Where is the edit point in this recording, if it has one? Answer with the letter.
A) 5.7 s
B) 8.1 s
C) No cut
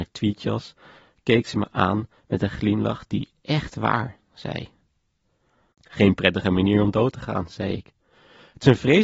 A